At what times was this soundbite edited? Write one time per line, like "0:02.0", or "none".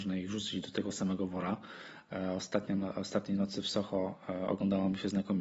none

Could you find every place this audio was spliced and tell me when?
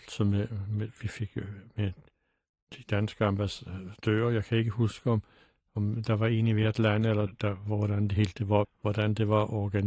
0:07.3
0:08.6

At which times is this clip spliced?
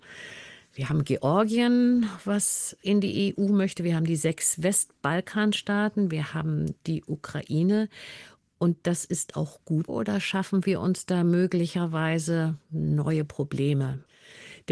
0:09.9

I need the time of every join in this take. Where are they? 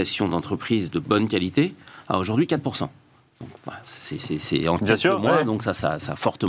none

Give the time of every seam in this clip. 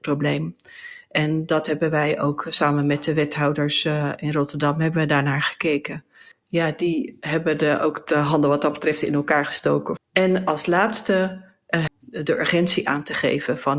0:10.0
0:11.9

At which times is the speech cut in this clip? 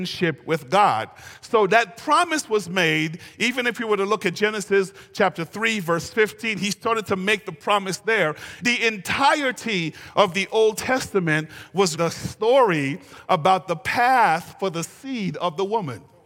0:08.6
0:11.9

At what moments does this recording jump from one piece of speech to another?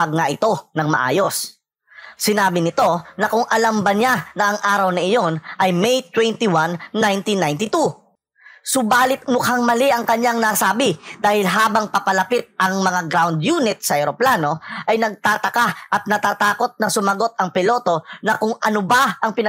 0:02.2

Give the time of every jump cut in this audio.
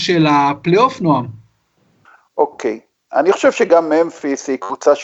none

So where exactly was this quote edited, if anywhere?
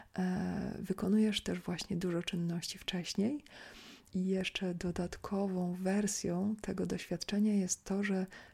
0:04.1

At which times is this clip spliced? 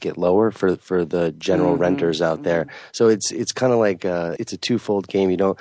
0:04.4

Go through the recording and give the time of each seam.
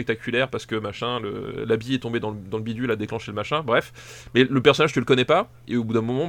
none

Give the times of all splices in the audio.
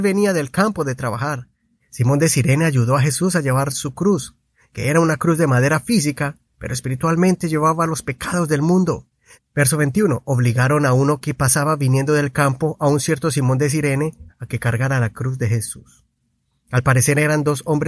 0:01.8
0:09.4
0:14.3

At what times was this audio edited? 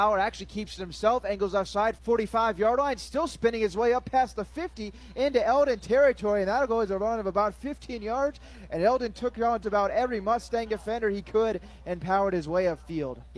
0:02.0
0:09.6

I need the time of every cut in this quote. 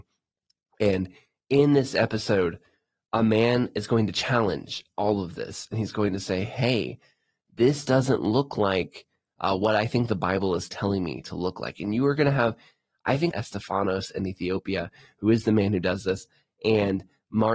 0:13.3

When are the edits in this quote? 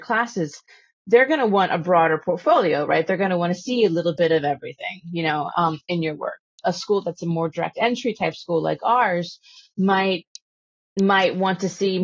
none

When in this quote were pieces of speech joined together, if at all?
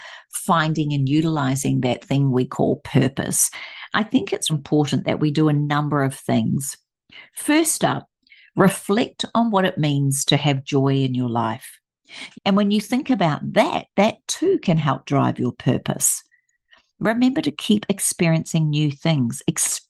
0:04.5
0:12.3

